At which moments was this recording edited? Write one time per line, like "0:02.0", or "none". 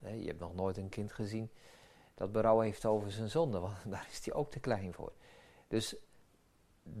none